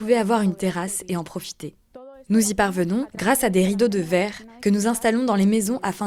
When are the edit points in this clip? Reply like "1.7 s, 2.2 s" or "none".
none